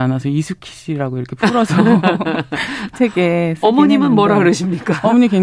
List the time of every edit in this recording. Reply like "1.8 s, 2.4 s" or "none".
none